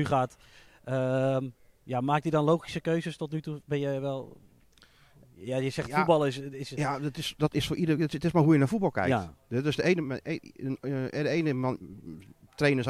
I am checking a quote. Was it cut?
no; 0 cuts

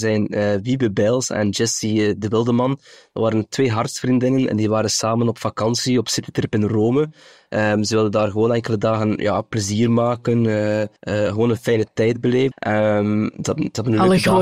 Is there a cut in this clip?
yes; 2 cuts; at 11.0 s, 12.5 s

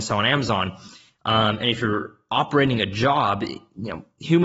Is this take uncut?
yes; 0 cuts

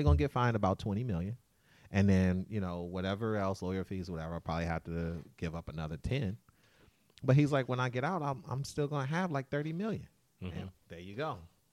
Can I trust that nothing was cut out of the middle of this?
no; 1 cut; at 10.8 s

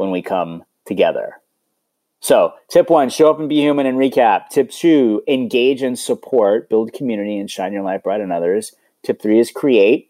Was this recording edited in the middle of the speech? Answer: no; 0 cuts

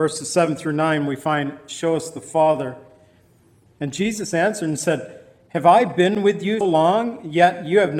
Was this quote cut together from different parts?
yes; 2 cuts; at 3.7 s, 6.6 s

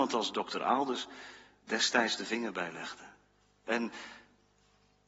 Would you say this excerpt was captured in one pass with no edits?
yes; 0 cuts

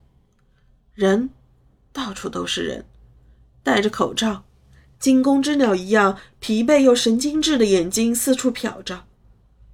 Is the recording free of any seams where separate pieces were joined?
yes; 0 cuts

